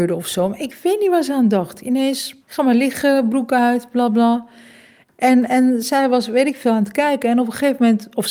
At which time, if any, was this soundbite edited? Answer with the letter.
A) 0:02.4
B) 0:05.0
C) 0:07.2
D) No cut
A